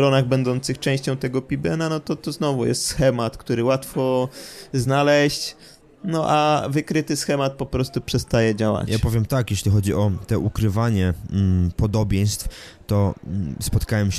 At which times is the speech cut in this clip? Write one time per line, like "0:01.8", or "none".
none